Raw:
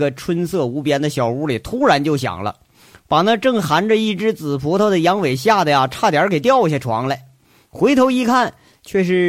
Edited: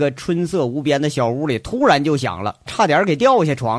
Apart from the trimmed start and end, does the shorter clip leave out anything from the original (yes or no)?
yes